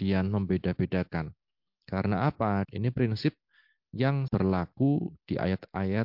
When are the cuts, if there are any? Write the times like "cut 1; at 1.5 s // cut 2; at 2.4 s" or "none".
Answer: cut 1; at 2.6 s